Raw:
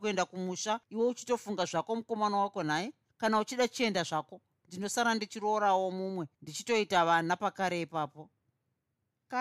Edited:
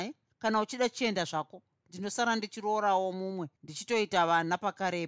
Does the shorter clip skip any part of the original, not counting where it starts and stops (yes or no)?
no